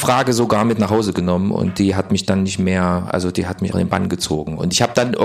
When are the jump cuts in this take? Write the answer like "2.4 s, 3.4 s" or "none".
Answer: 3.7 s